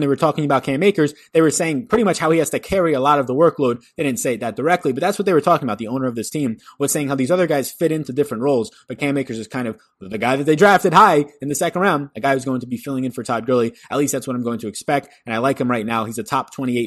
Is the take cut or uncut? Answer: uncut